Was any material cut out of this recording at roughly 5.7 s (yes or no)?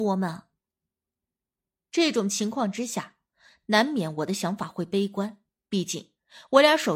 yes